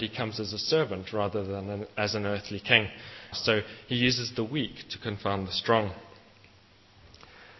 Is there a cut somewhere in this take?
yes; 1 cut; at 3.3 s

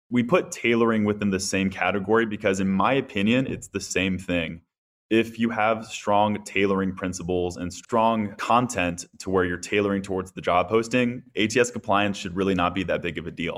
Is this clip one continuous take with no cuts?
yes; 0 cuts

